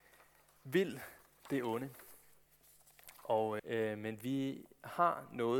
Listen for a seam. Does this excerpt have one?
yes; 1 cut; at 3.6 s

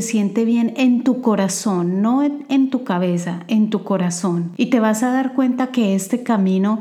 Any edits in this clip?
no; 0 cuts

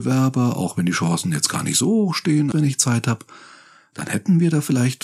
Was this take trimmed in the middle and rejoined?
yes; 1 cut; at 2.5 s

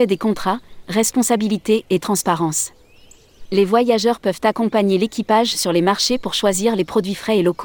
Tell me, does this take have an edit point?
yes; 1 cut; at 3.5 s

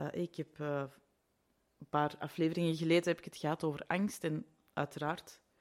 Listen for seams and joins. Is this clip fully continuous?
yes; 0 cuts

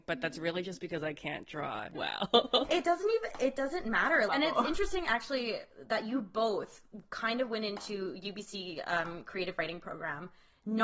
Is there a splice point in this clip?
yes; 1 cut; at 4.3 s

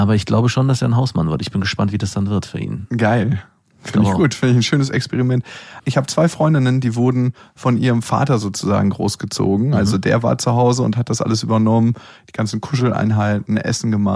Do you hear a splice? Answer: no; 0 cuts

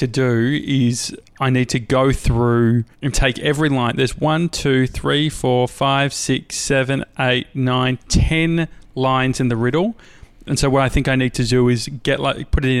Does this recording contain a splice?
yes; 1 cut; at 2.9 s

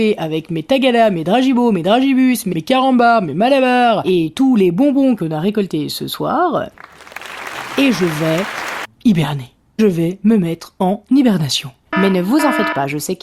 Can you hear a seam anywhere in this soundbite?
yes; 2 cuts; at 8.9 s, 11.9 s

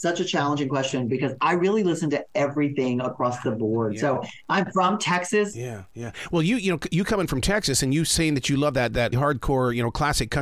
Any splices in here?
yes; 2 cuts; at 5.5 s, 9.1 s

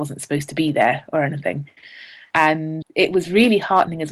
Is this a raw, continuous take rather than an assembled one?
no; 1 cut; at 2.8 s

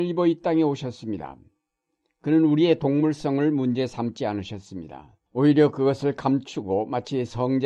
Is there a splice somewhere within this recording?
yes; 1 cut; at 5.3 s

